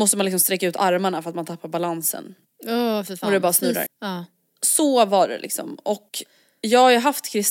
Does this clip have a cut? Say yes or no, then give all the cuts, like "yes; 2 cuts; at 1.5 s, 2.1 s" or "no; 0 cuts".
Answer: yes; 1 cut; at 3.9 s